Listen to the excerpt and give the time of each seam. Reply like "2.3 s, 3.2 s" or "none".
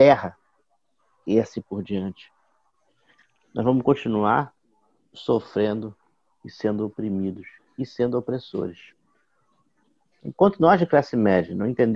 10.1 s